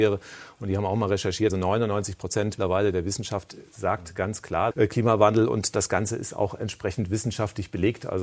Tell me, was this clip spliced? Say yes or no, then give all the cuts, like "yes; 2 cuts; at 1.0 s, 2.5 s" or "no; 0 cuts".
yes; 3 cuts; at 1.5 s, 2.6 s, 4.7 s